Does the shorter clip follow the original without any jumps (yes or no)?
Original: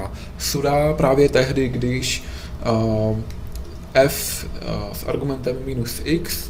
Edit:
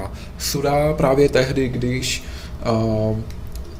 yes